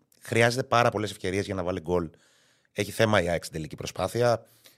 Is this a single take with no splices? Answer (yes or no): yes